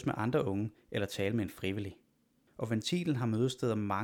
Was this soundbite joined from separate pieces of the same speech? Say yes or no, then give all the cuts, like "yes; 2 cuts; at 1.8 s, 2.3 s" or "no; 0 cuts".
yes; 1 cut; at 2.5 s